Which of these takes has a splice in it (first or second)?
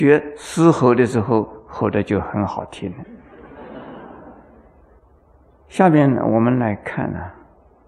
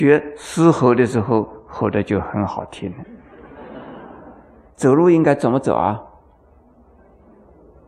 second